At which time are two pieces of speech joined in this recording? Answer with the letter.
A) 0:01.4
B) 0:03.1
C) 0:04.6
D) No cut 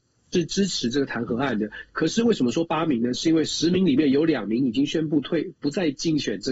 D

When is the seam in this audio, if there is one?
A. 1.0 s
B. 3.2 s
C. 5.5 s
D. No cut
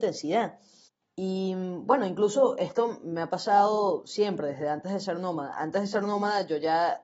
A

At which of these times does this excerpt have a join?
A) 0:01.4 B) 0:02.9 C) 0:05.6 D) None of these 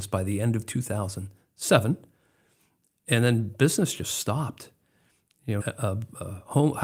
C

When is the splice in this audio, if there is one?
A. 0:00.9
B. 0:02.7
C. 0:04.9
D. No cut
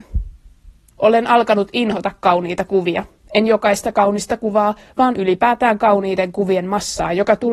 A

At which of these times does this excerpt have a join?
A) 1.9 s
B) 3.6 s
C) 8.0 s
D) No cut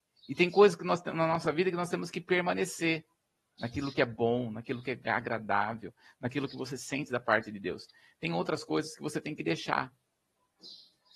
B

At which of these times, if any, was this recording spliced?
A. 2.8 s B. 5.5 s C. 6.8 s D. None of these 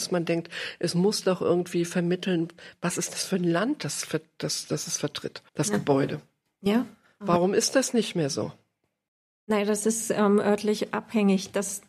B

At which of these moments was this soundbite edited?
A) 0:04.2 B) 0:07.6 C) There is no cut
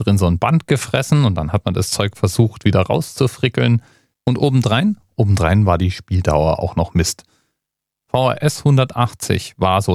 A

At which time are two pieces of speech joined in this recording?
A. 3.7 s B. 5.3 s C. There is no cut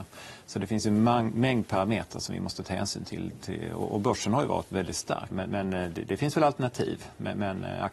B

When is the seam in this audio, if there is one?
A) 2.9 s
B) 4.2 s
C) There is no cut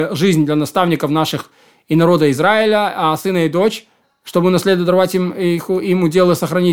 C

